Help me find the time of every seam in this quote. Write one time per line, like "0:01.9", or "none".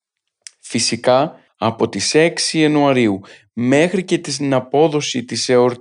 0:01.5